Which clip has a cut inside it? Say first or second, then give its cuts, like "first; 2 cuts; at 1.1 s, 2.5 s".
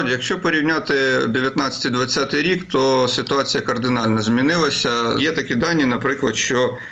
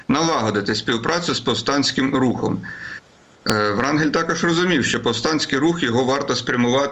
first; 1 cut; at 5.2 s